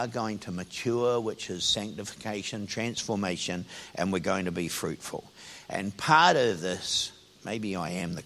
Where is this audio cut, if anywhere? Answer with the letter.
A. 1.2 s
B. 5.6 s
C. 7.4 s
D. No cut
C